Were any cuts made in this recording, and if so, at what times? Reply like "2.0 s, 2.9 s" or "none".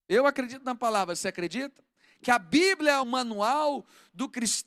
3.0 s